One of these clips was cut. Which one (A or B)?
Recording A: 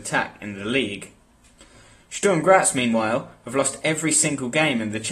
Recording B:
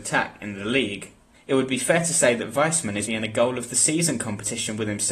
B